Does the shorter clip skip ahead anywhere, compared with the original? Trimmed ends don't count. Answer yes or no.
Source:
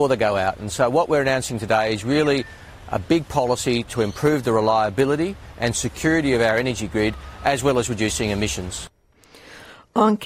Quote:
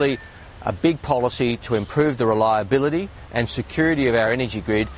no